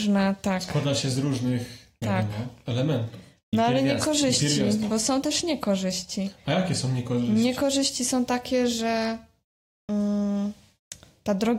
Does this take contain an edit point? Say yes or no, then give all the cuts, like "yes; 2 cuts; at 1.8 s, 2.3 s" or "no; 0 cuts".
no; 0 cuts